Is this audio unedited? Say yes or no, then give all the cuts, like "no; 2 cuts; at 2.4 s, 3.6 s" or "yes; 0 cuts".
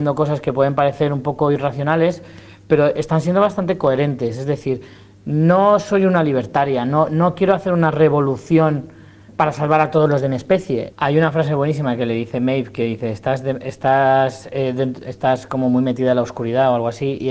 no; 1 cut; at 10.9 s